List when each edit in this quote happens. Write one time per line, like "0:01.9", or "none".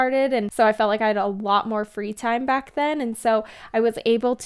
none